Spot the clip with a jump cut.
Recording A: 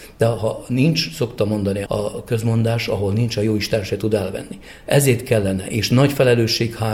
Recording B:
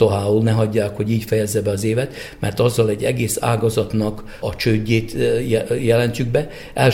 A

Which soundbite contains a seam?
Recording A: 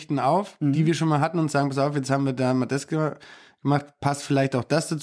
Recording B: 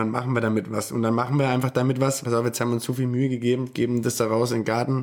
B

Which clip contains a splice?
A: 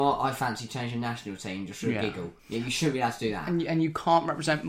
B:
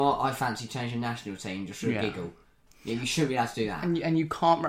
A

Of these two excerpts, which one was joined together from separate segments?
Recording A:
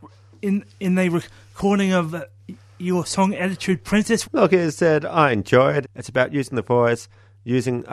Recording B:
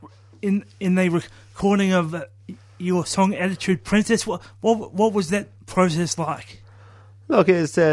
A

